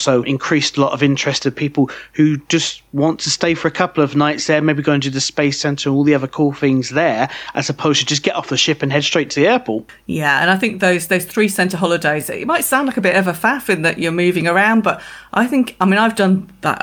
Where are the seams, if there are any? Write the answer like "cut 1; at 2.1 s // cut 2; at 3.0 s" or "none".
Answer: none